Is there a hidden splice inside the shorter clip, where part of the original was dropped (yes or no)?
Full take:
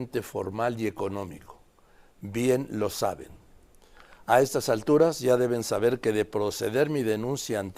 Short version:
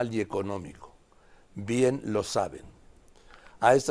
no